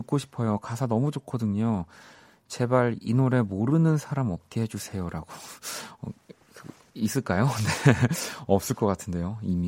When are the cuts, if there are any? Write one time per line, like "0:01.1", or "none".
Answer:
none